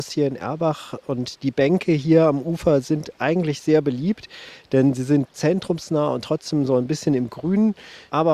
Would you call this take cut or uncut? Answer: uncut